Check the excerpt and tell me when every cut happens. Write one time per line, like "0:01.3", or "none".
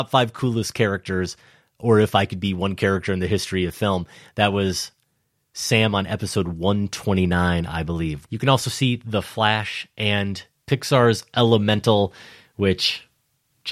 0:08.2